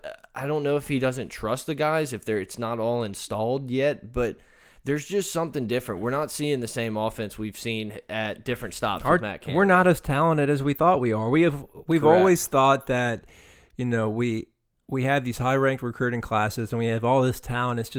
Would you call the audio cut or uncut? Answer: uncut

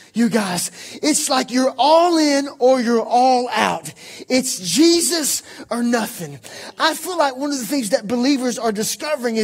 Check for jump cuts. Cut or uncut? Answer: uncut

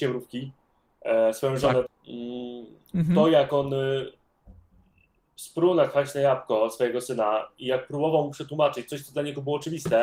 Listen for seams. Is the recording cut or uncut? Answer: cut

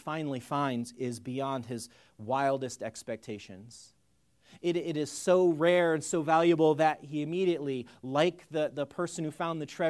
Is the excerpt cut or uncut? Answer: uncut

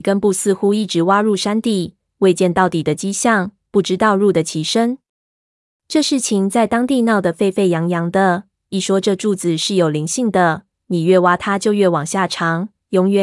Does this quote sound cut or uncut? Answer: uncut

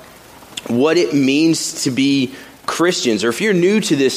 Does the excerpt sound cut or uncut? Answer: uncut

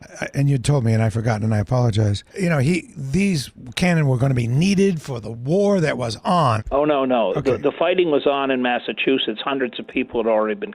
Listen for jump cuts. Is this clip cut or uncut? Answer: cut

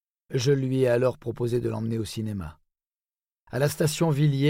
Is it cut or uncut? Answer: cut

